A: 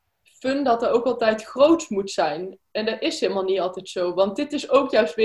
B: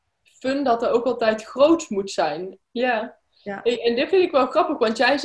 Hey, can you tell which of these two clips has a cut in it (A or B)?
B